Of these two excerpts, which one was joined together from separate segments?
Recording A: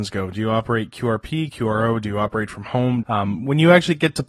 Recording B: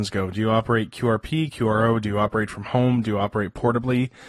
A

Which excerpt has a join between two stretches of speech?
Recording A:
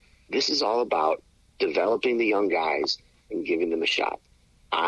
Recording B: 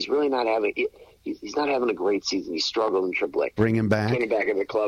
B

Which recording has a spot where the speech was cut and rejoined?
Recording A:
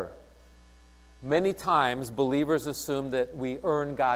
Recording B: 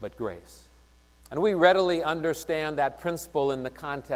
B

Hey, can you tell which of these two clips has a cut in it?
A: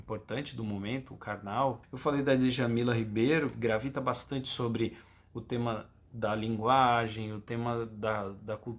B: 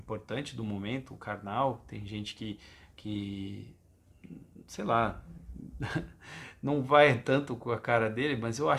A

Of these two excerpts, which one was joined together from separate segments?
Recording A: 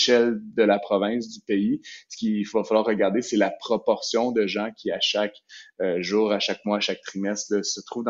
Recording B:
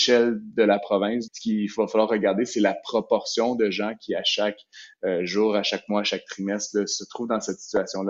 B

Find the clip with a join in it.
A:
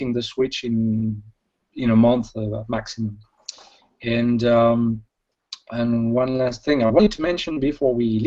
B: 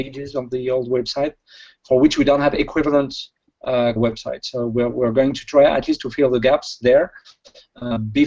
B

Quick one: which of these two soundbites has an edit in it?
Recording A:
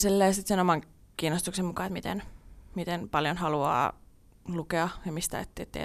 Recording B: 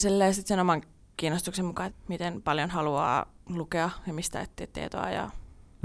B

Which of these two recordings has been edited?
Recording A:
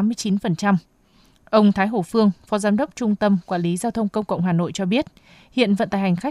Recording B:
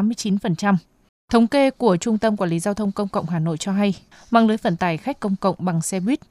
B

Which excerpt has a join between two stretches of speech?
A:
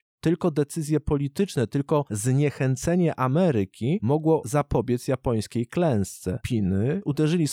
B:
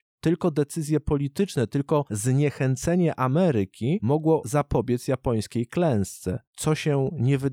A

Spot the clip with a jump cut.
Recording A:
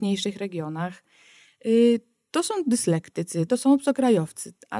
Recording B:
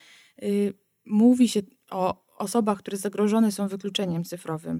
A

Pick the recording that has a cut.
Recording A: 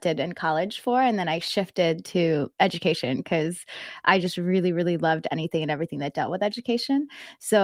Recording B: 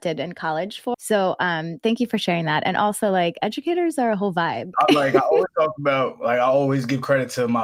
B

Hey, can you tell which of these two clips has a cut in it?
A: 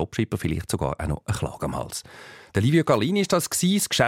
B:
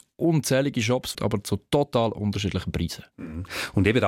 B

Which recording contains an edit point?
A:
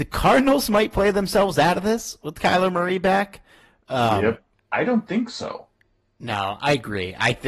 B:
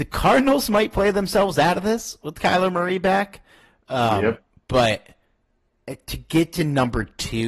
A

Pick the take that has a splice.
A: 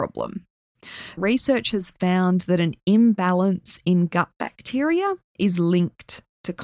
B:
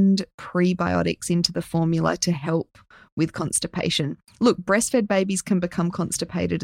A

